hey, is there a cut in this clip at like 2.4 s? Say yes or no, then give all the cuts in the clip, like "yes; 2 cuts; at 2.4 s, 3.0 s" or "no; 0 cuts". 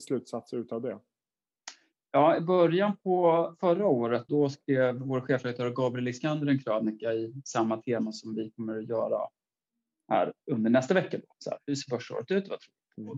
no; 1 cut; at 4.3 s